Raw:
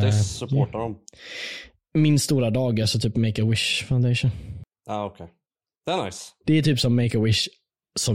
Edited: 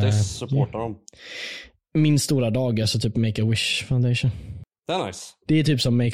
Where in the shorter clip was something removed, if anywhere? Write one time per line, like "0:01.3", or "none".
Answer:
0:04.8